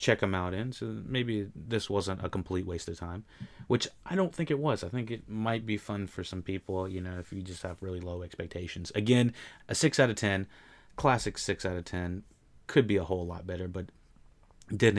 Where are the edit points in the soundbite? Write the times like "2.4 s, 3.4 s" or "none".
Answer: 9.6 s